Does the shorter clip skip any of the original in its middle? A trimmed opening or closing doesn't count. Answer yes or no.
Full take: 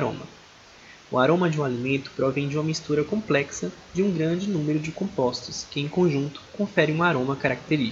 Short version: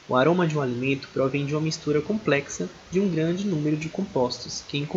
no